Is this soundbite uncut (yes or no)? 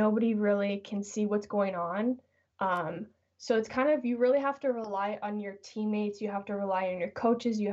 yes